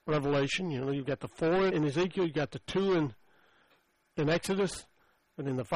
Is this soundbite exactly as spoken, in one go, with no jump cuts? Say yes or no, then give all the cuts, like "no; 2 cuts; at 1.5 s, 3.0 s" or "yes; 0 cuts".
no; 1 cut; at 1.7 s